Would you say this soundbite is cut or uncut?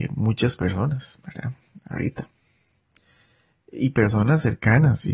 uncut